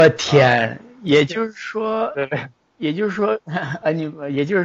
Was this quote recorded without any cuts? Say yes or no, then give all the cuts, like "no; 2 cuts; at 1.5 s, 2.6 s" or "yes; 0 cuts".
yes; 0 cuts